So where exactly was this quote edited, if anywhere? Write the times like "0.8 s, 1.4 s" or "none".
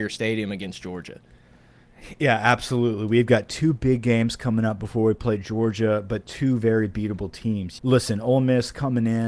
7.8 s